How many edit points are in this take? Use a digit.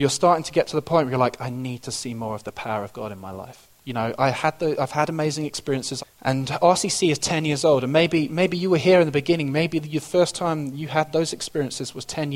1